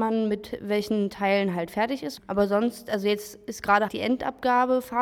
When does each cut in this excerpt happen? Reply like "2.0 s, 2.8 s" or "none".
2.2 s, 3.9 s